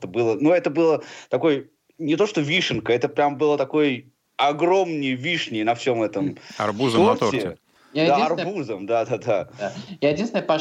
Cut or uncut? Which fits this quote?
uncut